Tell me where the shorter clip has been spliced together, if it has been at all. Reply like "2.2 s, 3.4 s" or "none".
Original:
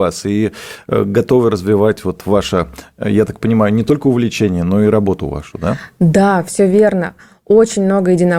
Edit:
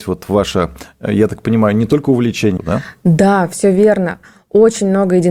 2.6 s